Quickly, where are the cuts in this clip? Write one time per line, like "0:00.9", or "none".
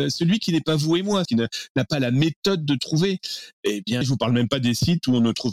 0:01.3
0:04.0